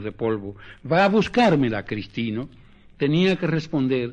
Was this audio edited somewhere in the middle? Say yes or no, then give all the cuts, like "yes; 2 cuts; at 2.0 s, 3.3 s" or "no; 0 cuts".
no; 0 cuts